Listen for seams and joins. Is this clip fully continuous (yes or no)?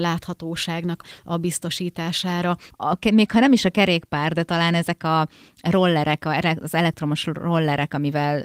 no